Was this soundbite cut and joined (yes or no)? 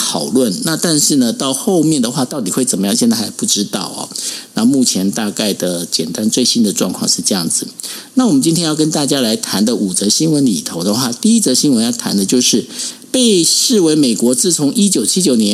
no